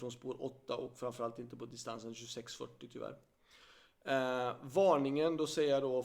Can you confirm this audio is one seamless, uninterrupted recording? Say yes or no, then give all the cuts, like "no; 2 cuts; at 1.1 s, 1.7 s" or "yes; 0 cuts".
yes; 0 cuts